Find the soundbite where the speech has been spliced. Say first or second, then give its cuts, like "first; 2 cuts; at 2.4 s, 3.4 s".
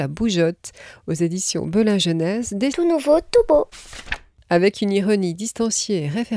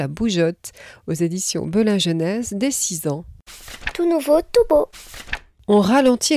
first; 2 cuts; at 2.7 s, 4.4 s